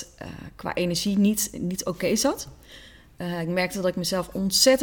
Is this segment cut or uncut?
uncut